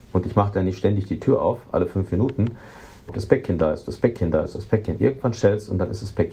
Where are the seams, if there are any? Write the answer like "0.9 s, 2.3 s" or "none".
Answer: 3.1 s